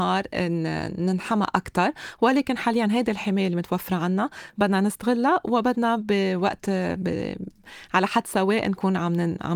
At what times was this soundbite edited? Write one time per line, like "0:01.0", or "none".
none